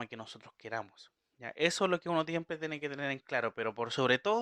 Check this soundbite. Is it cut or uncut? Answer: uncut